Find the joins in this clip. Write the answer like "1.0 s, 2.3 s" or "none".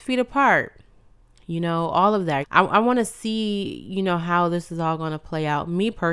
2.4 s